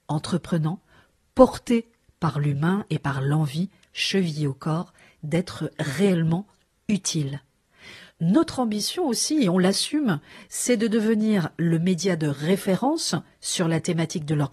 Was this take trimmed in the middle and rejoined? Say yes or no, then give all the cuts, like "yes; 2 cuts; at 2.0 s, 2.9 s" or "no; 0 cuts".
yes; 1 cut; at 8.1 s